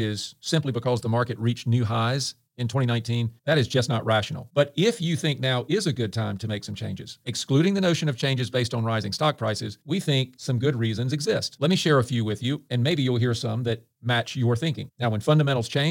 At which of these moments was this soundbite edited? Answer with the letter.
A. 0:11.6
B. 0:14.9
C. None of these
B